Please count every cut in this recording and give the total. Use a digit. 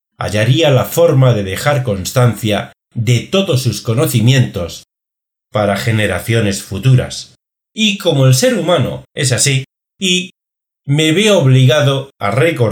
2